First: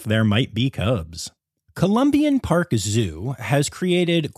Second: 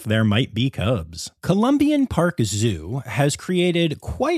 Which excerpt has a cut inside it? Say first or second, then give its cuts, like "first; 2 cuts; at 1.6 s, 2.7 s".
second; 1 cut; at 1.4 s